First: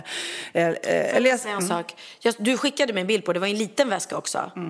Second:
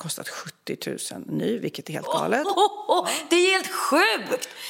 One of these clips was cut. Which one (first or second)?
second